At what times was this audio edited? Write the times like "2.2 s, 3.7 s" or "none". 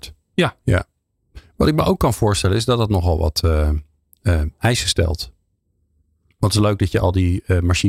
none